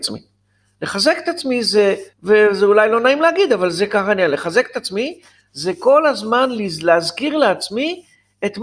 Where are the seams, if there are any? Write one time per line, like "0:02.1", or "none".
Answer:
0:02.1

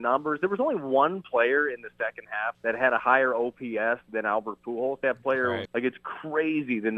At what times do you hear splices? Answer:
0:02.5
0:05.7

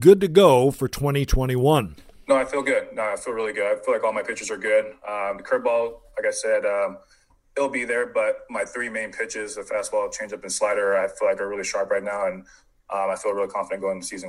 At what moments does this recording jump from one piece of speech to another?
none

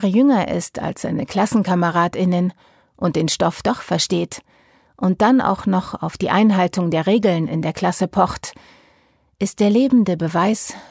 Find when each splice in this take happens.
none

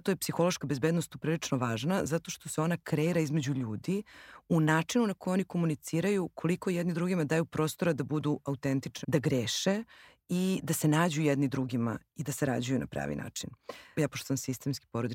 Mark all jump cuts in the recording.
0:09.0
0:13.9

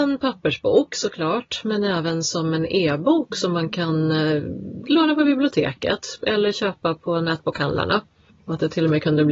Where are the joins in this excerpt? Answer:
0:08.3

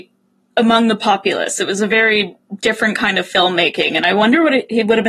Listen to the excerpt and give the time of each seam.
none

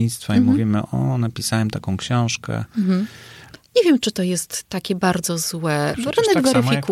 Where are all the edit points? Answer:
0:03.6
0:05.9

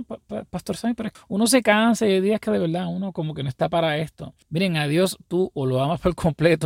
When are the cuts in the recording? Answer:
0:01.1
0:04.4

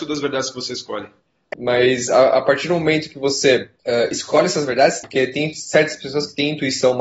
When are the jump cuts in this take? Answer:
0:01.5
0:03.8
0:05.0

